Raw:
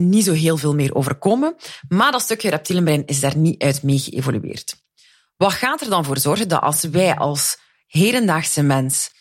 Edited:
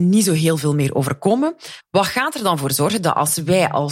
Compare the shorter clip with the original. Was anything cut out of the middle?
yes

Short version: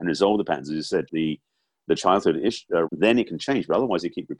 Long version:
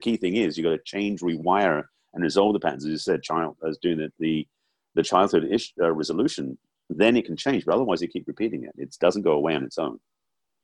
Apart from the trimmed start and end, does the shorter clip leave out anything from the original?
yes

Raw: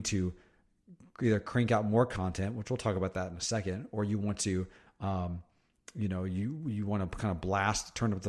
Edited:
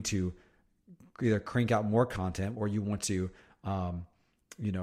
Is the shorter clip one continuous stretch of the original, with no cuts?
no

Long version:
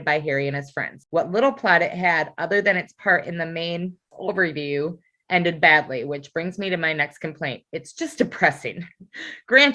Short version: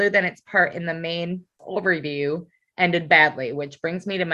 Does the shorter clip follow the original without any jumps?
yes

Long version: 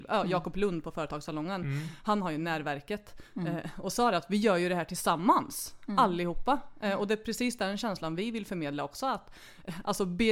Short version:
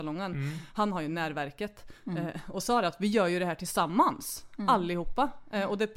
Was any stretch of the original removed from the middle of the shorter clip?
no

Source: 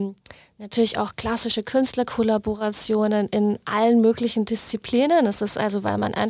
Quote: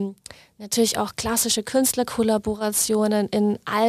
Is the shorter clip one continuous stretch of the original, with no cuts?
yes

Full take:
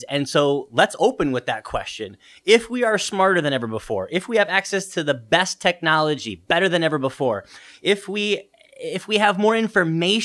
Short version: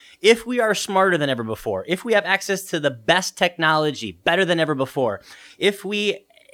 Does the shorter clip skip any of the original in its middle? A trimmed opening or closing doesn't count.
no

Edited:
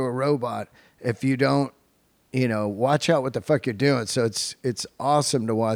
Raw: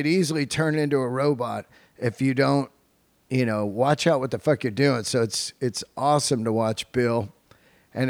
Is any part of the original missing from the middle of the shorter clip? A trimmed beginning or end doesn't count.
no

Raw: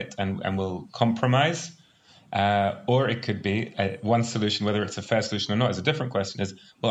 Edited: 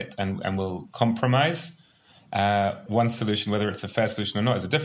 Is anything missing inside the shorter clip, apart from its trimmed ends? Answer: yes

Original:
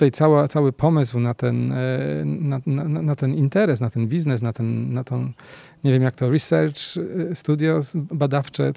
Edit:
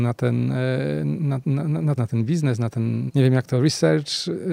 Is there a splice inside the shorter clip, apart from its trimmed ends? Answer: yes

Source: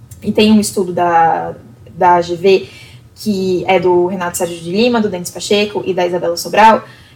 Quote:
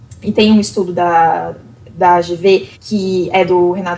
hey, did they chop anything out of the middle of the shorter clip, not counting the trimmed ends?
yes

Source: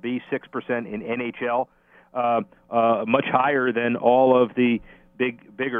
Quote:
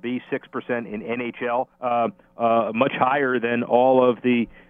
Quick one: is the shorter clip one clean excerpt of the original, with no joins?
no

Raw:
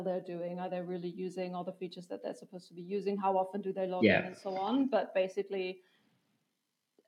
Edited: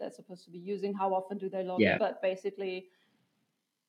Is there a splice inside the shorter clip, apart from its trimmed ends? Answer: yes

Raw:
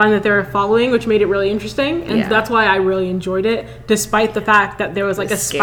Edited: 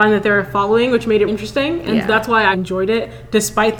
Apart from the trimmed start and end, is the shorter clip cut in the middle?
yes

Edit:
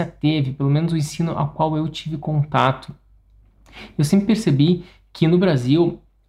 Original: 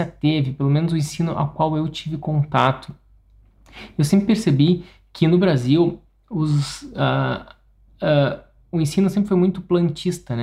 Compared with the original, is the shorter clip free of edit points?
yes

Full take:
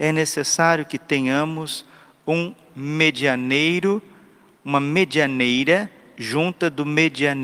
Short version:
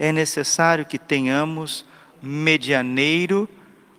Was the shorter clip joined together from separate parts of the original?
yes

